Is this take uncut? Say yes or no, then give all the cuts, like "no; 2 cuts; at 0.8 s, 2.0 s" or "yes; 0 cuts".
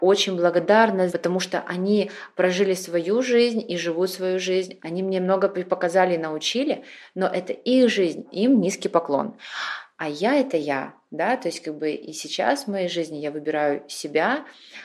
no; 2 cuts; at 1.1 s, 4.8 s